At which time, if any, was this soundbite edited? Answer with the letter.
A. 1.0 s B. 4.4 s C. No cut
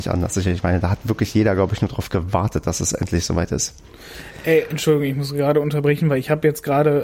C